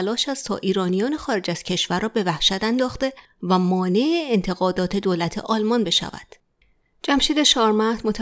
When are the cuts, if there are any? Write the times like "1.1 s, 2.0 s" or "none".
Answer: none